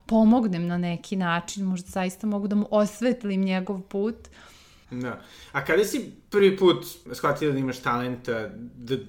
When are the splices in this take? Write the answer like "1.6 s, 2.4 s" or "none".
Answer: 4.8 s, 7.1 s

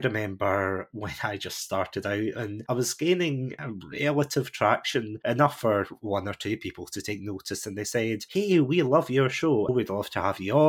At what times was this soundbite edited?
9.7 s

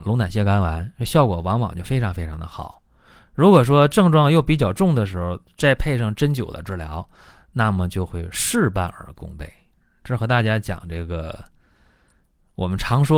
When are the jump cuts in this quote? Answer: none

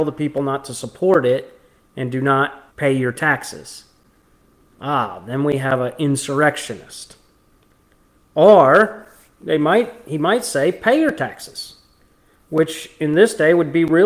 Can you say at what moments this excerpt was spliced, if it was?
2.7 s

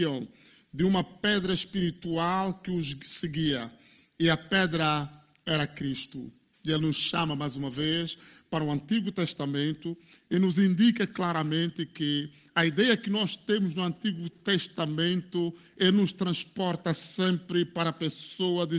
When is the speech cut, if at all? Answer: none

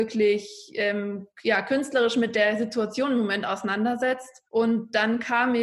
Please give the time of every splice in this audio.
4.5 s

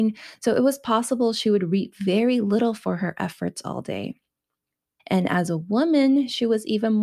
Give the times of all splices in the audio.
5.0 s

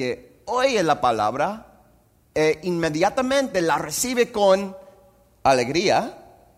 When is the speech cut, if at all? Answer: none

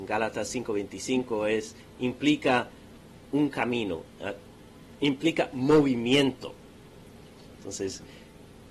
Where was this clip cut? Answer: 7.5 s

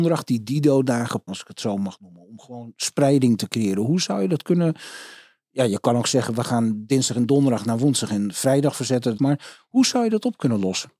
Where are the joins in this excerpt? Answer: 1.3 s, 9.2 s

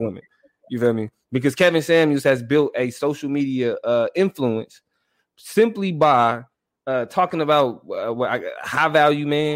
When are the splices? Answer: none

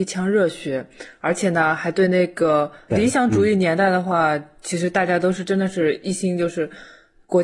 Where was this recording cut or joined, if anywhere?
2.9 s

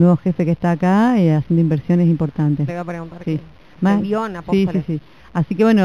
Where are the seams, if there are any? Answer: 2.7 s

